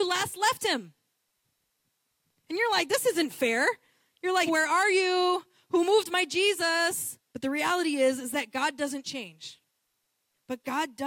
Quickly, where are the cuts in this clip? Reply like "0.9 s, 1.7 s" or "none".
4.5 s, 7.2 s